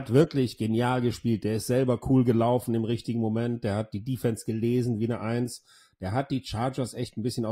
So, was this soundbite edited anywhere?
no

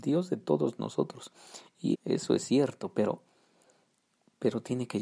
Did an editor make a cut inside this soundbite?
yes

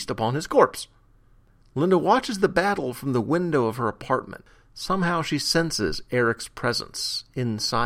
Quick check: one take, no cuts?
yes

